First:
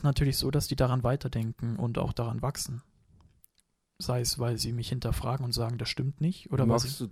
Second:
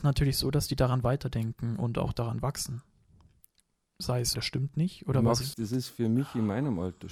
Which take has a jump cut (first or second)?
second